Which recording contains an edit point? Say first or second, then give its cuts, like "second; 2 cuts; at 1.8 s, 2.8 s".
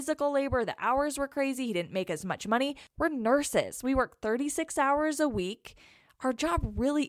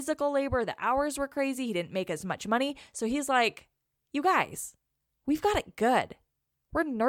first; 1 cut; at 2.9 s